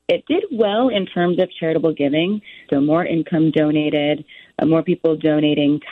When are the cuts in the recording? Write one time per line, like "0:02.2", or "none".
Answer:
0:02.7